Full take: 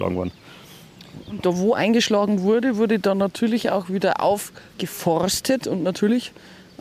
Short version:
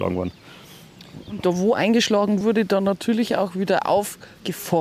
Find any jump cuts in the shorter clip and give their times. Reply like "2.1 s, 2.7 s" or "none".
2.4 s